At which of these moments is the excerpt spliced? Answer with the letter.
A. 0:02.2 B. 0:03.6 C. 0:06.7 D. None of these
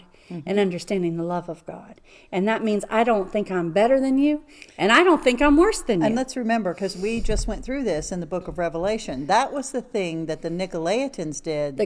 D